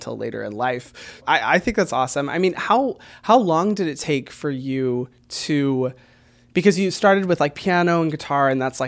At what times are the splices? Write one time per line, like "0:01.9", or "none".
0:01.2